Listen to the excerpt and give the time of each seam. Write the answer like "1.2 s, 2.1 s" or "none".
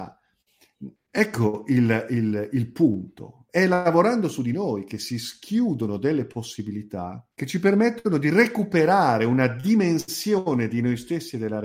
1.0 s, 3.5 s, 7.3 s

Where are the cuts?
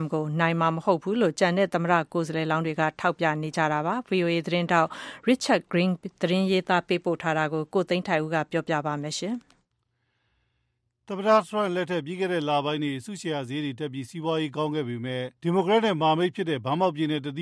15.4 s

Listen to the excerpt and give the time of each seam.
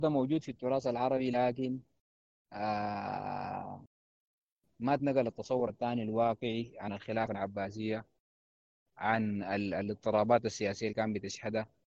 none

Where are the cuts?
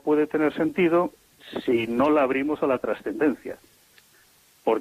none

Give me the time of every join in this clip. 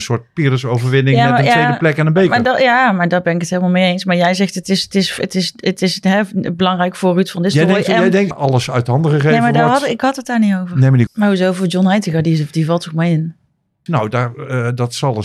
8.3 s, 11.1 s, 13.9 s

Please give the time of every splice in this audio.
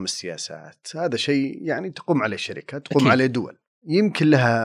none

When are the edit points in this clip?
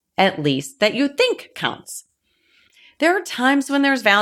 none

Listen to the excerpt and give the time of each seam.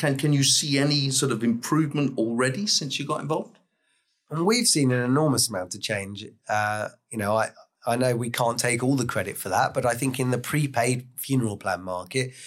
none

